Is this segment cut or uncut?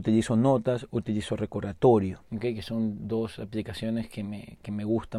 cut